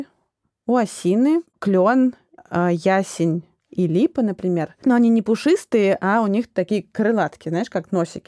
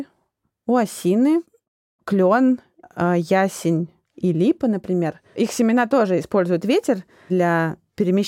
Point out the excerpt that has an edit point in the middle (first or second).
first